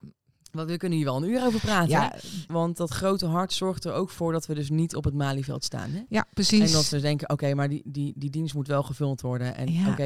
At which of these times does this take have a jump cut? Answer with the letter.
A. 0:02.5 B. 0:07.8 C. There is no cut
A